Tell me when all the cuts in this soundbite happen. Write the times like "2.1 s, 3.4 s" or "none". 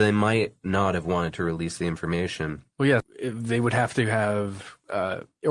3.0 s